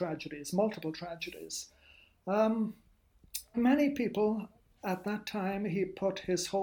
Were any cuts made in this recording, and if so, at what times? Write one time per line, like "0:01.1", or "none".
0:03.5